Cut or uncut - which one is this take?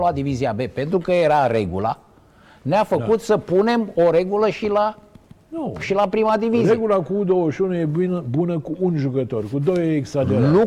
uncut